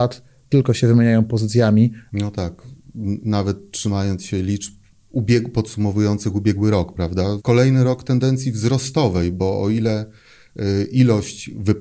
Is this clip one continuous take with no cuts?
no; 2 cuts; at 2.1 s, 7.4 s

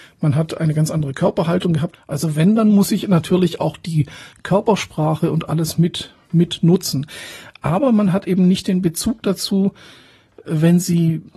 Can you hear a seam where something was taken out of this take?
yes; 2 cuts; at 1.9 s, 6.2 s

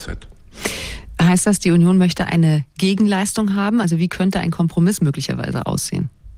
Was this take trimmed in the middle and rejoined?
no; 0 cuts

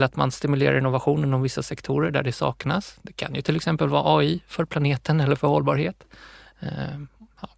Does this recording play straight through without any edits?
yes; 0 cuts

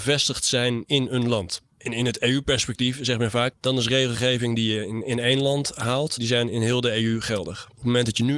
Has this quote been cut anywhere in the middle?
yes; 2 cuts; at 3.5 s, 6.2 s

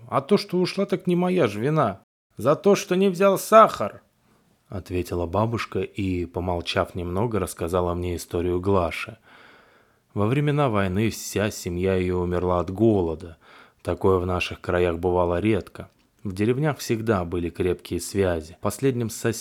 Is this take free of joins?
yes; 0 cuts

